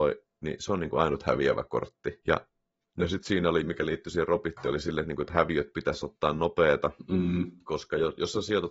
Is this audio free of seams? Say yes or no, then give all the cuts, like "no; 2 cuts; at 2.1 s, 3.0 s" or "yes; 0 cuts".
yes; 0 cuts